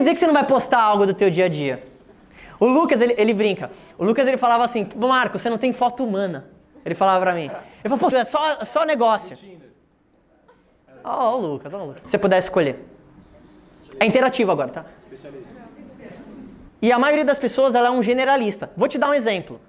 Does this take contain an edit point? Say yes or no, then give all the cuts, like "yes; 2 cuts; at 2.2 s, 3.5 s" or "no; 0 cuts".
yes; 3 cuts; at 8.1 s, 12.0 s, 16.7 s